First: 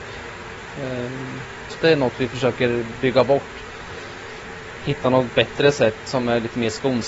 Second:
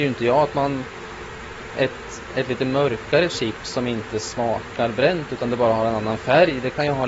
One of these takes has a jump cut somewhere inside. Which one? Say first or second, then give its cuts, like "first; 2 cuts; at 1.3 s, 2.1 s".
first; 1 cut; at 1.7 s